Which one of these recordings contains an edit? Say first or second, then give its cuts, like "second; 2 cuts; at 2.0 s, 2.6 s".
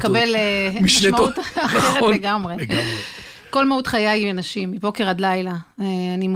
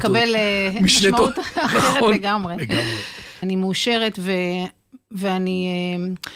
second; 1 cut; at 3.4 s